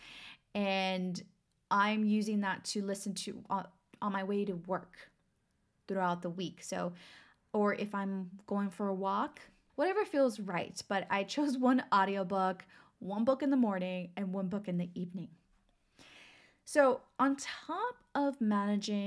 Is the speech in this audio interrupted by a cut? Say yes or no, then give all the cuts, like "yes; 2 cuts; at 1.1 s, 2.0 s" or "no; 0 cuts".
yes; 1 cut; at 9.7 s